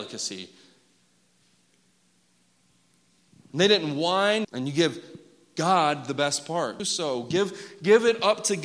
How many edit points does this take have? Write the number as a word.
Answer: two